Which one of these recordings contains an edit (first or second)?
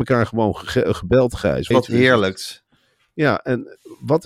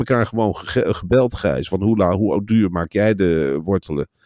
first